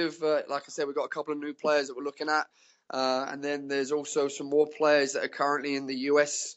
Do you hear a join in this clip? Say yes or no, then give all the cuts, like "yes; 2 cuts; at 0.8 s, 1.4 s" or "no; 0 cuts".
no; 0 cuts